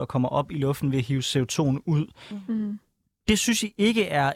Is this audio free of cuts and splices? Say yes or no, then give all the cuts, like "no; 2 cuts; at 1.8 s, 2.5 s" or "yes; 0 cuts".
yes; 0 cuts